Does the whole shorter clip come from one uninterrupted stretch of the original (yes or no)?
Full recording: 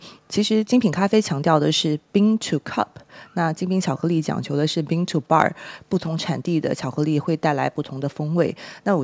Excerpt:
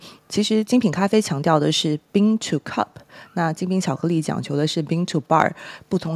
yes